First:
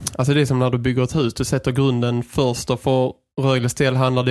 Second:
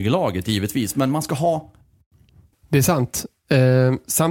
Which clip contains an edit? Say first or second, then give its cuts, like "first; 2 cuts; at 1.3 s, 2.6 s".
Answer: second; 1 cut; at 2.5 s